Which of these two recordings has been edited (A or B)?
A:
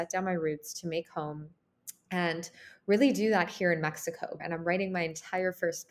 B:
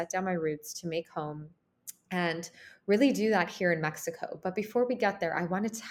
A